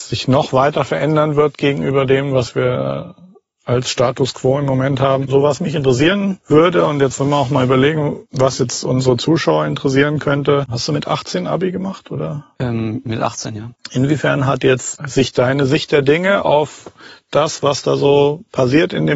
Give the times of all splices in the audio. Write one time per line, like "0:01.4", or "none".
0:10.7